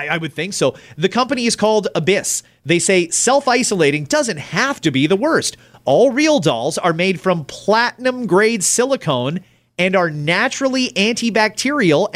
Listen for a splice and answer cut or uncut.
uncut